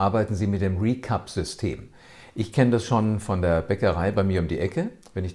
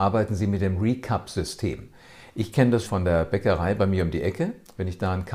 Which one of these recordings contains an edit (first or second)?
second